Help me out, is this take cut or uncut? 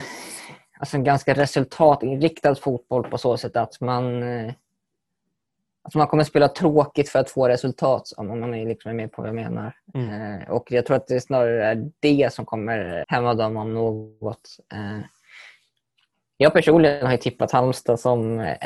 cut